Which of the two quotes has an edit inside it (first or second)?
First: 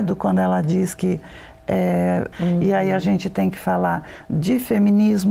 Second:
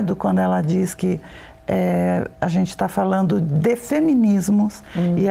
first